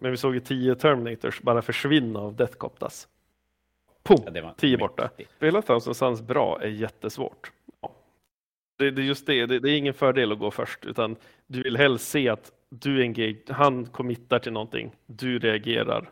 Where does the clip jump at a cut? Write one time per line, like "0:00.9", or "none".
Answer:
0:05.4
0:07.7